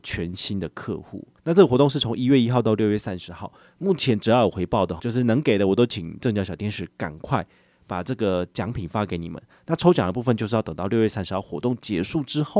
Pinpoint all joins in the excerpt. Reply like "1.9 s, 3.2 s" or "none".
1.4 s, 5.0 s